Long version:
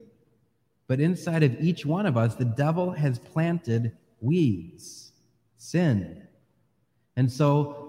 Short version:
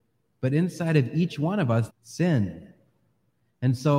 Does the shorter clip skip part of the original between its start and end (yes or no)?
yes